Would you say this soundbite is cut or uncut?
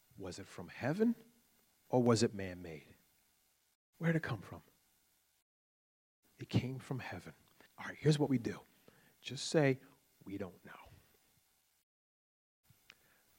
cut